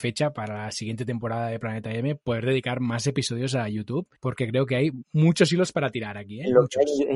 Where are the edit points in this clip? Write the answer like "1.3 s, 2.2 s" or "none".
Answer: 4.2 s